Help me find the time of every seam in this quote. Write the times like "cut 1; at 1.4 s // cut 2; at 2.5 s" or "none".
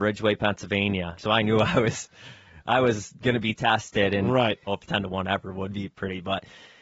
cut 1; at 1.2 s // cut 2; at 4.7 s

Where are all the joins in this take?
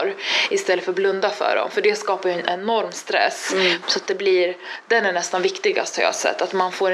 cut 1; at 3.8 s

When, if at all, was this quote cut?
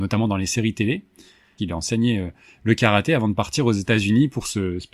cut 1; at 1.6 s

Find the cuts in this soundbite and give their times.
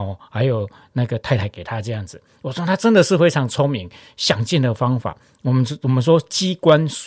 none

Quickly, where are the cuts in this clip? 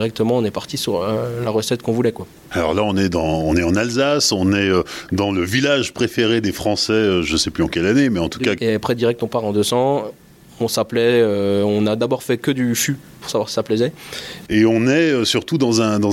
cut 1; at 8.6 s // cut 2; at 14.5 s

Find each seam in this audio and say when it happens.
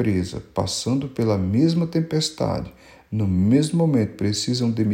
none

